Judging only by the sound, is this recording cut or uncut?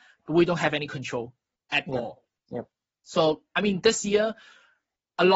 uncut